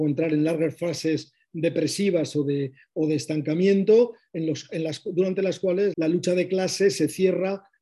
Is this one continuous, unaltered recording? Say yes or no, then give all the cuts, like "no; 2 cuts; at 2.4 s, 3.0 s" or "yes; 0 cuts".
no; 1 cut; at 5.9 s